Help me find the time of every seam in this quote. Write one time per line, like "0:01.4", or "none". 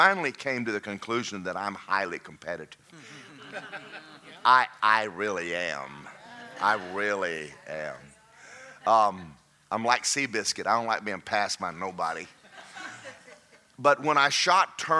none